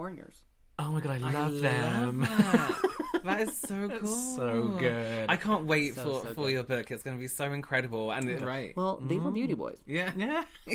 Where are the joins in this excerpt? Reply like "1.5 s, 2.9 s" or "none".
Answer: 8.4 s